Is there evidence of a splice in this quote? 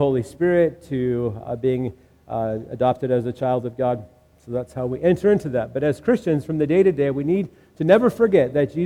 no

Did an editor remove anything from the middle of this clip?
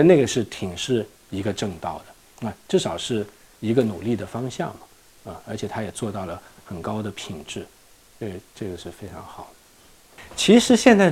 no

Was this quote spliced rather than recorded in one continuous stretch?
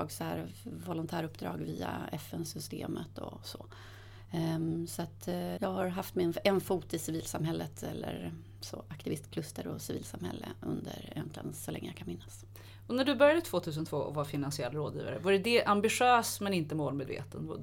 yes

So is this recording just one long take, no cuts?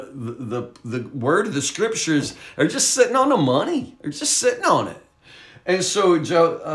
yes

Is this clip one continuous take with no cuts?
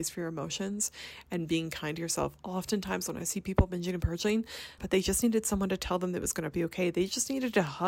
no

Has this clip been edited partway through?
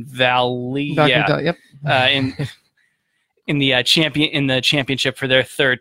no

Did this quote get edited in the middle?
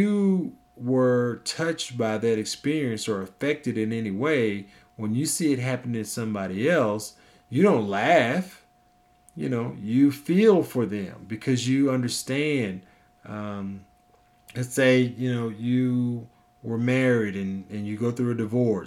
no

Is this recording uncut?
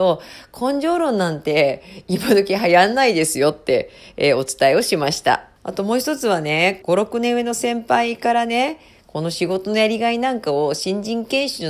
no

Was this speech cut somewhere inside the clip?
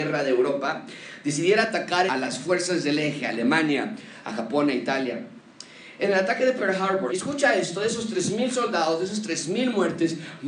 yes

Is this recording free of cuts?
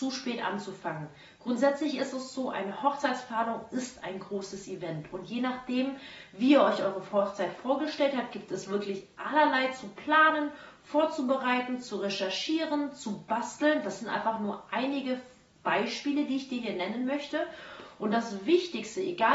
yes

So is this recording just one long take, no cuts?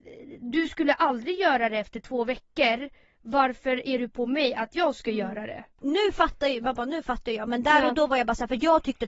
yes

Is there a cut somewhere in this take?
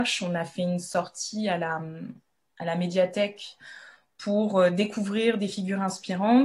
no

